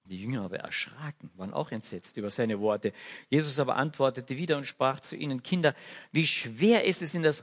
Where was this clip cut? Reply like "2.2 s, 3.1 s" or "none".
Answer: none